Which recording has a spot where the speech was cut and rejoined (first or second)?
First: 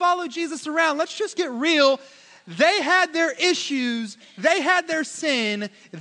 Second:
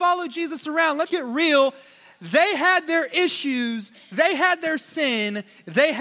second